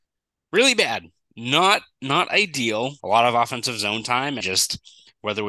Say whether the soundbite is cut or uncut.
cut